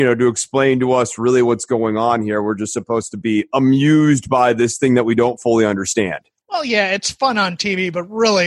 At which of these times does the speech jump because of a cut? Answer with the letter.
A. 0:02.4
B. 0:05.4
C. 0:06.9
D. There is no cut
D